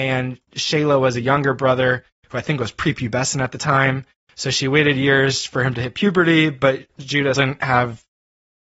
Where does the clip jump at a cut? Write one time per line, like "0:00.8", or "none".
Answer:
0:07.3